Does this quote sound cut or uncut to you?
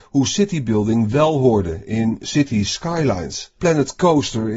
cut